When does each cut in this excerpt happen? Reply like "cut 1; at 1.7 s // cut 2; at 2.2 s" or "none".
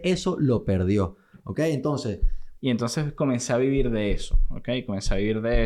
cut 1; at 2.6 s